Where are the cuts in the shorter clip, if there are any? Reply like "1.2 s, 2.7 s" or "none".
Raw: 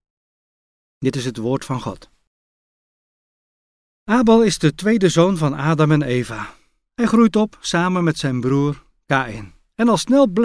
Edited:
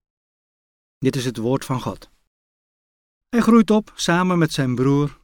3.2 s

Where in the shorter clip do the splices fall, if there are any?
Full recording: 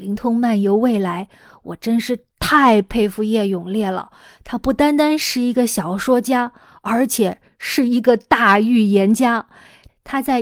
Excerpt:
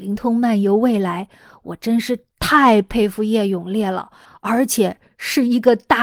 4.3 s

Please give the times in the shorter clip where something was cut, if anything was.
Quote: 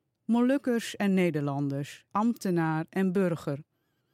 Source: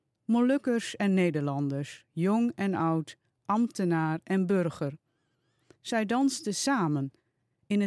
2.1 s

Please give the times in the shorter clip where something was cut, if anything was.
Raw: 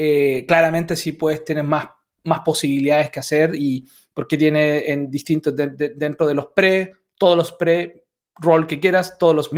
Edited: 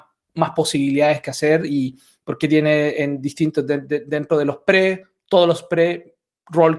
none

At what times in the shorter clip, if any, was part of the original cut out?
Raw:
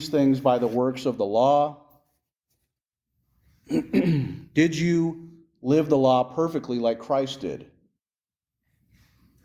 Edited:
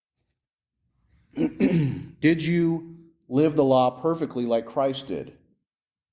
none

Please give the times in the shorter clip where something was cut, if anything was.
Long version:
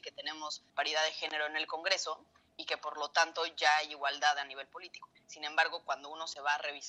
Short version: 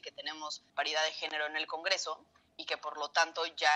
none

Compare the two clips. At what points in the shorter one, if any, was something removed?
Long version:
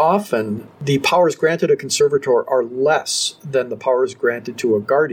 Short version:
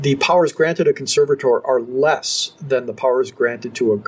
none

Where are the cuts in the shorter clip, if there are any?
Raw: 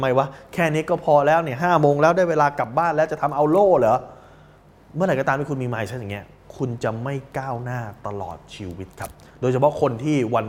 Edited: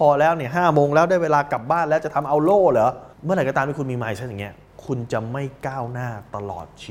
3.1 s

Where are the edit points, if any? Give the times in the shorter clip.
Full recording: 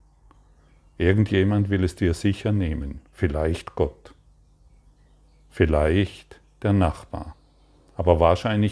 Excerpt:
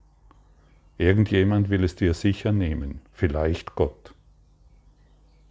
none

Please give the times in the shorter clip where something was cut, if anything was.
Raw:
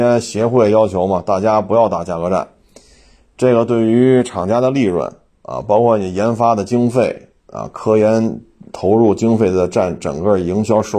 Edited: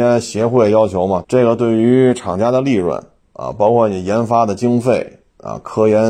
1.2 s

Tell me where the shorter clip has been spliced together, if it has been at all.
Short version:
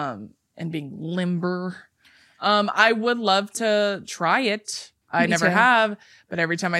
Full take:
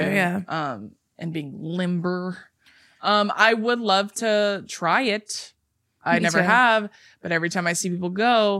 5.0 s

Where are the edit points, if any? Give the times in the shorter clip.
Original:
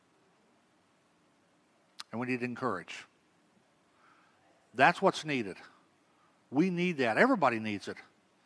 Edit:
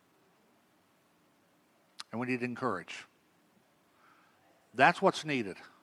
none

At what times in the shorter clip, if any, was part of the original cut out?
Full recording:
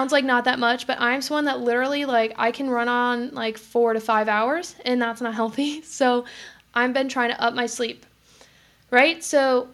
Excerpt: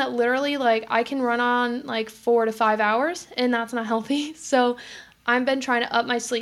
none

